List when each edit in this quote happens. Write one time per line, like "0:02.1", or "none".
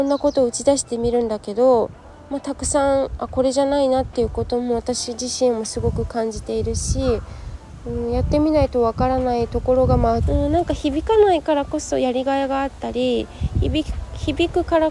0:10.2

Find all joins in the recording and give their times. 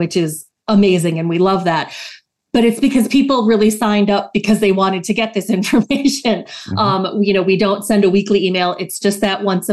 none

